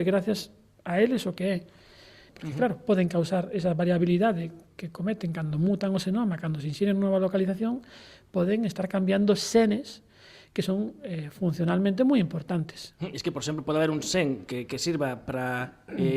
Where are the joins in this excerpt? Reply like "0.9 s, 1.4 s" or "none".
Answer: 2.3 s